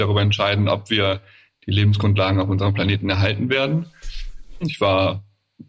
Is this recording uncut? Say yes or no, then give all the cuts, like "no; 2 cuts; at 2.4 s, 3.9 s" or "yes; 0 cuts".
no; 1 cut; at 4.6 s